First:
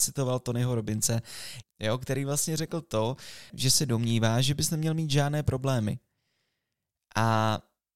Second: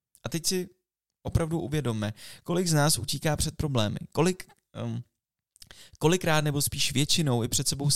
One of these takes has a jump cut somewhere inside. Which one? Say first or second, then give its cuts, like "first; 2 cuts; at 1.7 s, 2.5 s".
first; 2 cuts; at 1.6 s, 3.5 s